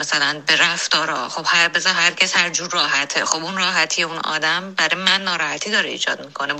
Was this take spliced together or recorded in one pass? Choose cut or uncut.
uncut